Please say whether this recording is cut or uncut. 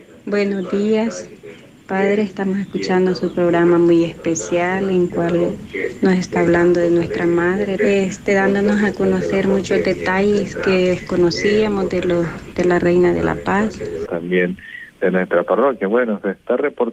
cut